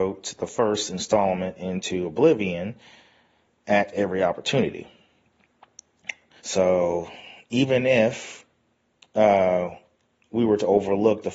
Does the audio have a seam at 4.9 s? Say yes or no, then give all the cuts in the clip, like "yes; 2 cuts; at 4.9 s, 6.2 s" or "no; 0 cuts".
no; 1 cut; at 6.4 s